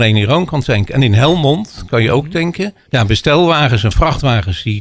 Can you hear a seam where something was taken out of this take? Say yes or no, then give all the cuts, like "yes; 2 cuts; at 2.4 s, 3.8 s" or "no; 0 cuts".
yes; 1 cut; at 2.9 s